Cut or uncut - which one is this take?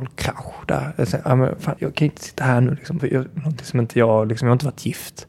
cut